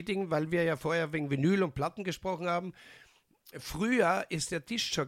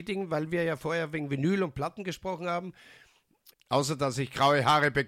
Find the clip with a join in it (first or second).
second